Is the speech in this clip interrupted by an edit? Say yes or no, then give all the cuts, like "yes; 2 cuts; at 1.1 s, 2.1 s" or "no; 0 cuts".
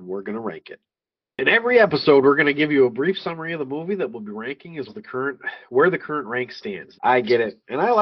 yes; 2 cuts; at 4.9 s, 6.9 s